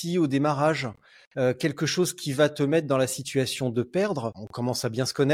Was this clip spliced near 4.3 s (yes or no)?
yes